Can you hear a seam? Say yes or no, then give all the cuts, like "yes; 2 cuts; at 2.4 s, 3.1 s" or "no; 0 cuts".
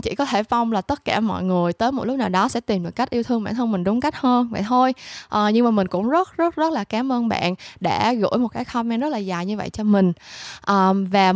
no; 0 cuts